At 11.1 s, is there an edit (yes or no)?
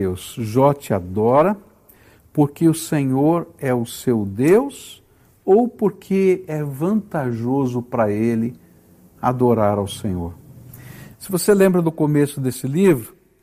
yes